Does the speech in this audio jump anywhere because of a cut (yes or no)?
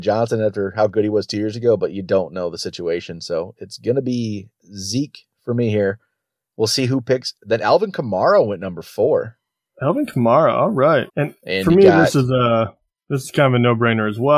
yes